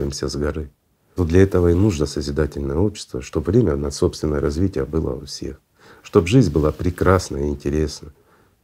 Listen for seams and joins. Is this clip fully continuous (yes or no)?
no